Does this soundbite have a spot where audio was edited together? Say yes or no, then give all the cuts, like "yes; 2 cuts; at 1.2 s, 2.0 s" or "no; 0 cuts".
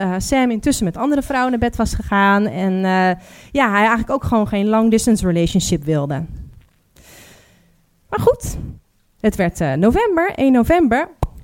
no; 0 cuts